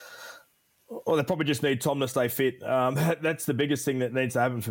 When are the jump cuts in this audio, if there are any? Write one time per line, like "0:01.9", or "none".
none